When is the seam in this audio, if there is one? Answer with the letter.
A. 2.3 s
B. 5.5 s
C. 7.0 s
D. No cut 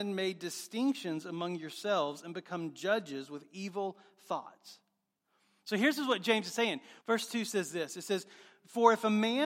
C